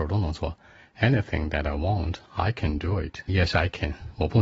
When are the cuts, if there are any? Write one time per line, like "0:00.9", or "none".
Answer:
0:03.3